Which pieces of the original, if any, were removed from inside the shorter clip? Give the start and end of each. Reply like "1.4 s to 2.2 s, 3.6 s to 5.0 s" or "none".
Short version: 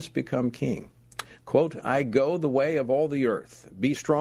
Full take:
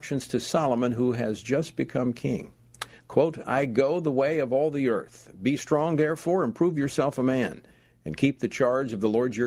none